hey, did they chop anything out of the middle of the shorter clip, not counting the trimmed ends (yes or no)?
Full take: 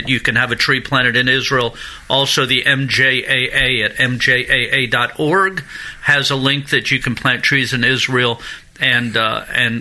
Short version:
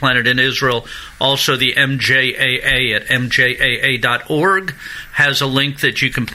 no